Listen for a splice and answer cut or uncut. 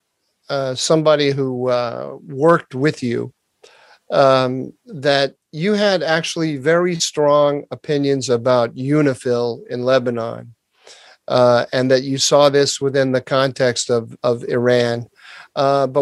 cut